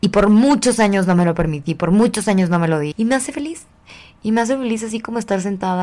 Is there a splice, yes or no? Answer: yes